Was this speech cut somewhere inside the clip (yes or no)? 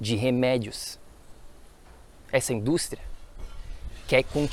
no